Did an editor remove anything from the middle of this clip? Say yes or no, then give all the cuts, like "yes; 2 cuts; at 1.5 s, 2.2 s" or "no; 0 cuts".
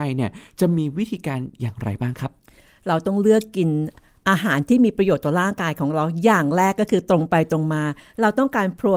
no; 0 cuts